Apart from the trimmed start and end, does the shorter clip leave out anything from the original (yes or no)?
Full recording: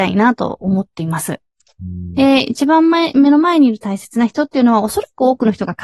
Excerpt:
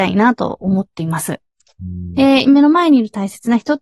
yes